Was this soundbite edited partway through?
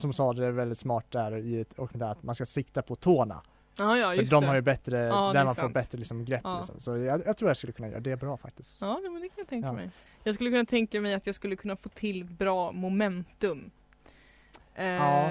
yes; 1 cut; at 10.1 s

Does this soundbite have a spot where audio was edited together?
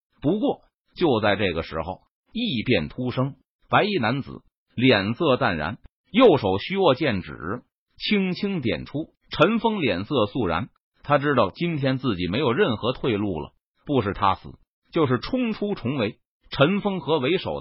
yes; 2 cuts; at 3.6 s, 9.2 s

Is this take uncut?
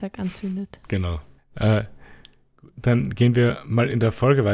no; 1 cut; at 1.4 s

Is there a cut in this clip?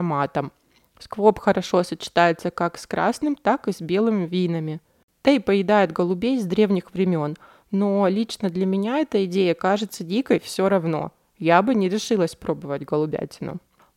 no; 0 cuts

